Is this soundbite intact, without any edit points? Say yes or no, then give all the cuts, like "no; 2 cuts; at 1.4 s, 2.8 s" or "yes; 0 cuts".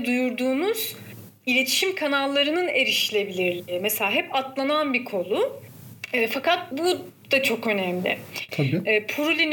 no; 2 cuts; at 6.7 s, 8.5 s